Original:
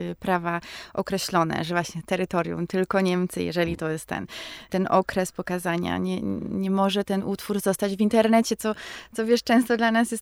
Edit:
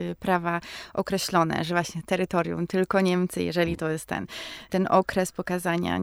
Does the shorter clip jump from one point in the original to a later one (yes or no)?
no